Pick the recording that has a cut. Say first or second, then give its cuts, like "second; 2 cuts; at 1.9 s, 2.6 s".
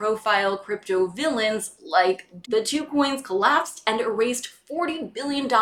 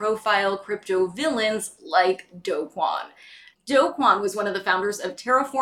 first; 1 cut; at 2.4 s